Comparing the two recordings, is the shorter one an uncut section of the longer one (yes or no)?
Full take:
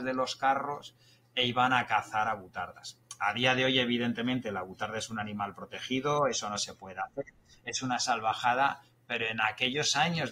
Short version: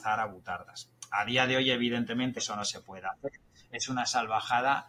no